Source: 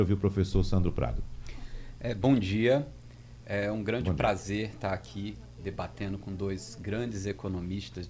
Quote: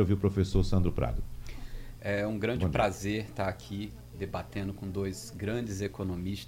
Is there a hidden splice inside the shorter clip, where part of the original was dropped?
yes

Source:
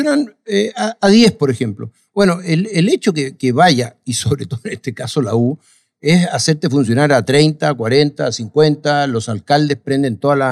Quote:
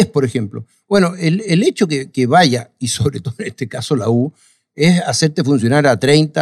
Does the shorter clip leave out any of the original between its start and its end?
no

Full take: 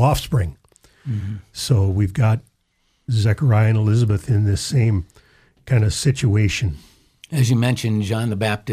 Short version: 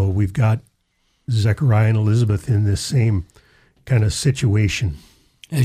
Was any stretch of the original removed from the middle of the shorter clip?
no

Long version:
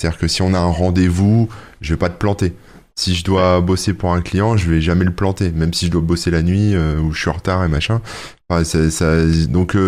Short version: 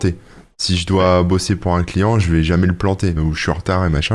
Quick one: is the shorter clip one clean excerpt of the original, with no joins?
no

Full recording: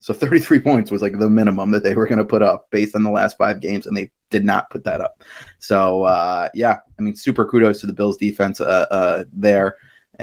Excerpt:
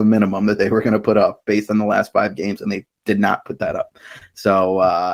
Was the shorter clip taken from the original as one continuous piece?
yes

